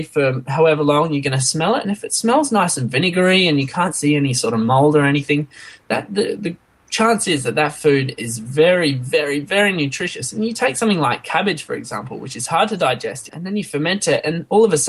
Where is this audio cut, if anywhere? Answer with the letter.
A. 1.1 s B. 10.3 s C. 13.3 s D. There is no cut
C